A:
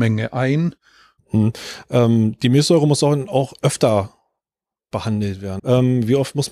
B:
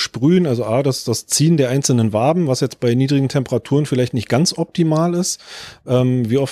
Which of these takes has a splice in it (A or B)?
A